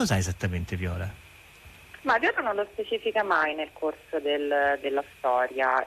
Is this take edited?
yes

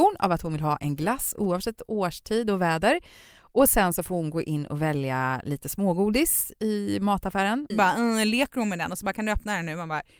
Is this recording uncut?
no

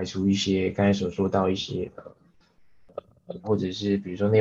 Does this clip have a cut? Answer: yes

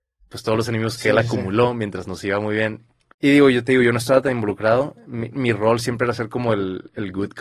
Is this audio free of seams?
no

